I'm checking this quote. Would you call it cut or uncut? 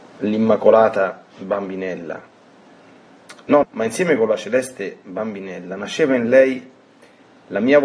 cut